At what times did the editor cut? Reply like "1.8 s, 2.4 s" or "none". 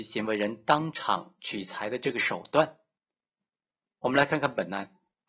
none